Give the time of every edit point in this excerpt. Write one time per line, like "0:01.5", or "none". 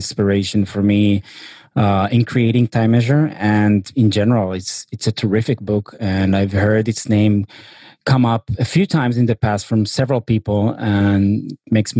none